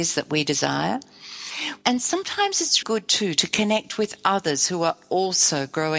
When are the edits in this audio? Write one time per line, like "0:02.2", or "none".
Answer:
0:01.8
0:02.8